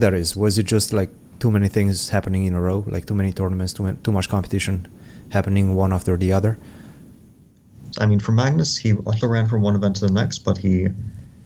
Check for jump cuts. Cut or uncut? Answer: cut